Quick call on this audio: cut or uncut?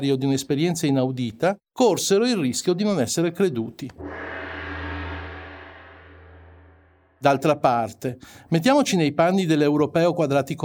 uncut